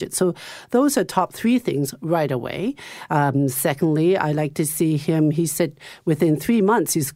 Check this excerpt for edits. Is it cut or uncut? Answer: cut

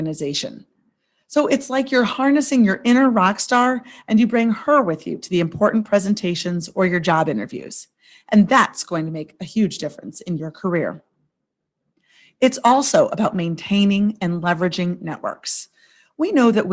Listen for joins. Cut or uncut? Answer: uncut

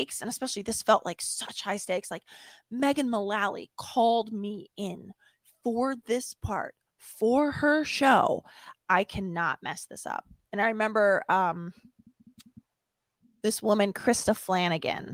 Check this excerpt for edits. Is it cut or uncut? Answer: uncut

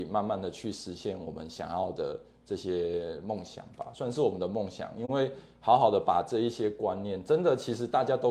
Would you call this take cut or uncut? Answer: uncut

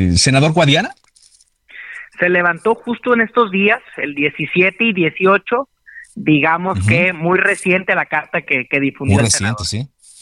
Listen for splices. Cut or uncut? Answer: uncut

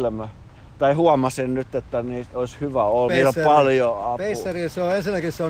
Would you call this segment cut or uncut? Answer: cut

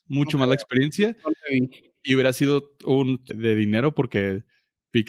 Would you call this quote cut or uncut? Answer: cut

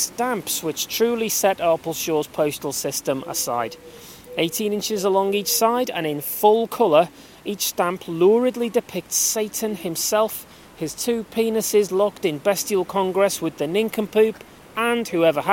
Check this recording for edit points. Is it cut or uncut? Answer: uncut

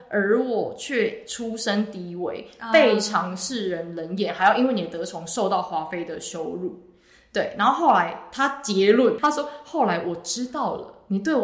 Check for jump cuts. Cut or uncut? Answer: uncut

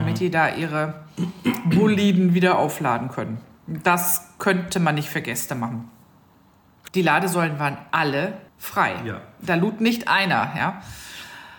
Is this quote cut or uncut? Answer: cut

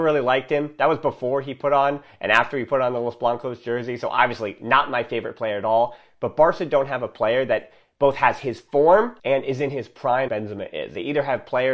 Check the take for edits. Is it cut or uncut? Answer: cut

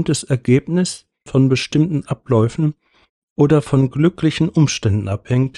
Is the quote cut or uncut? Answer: cut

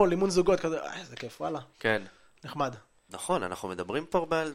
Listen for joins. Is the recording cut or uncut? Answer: cut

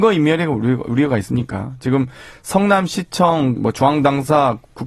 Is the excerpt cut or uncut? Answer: cut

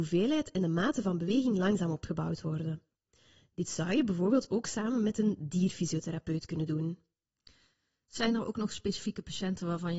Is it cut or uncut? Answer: uncut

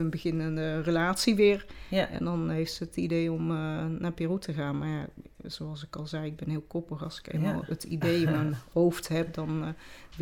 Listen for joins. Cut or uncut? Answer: uncut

